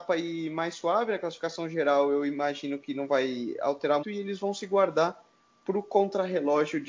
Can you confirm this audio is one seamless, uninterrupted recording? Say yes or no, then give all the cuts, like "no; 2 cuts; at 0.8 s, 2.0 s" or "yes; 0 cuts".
no; 1 cut; at 4.0 s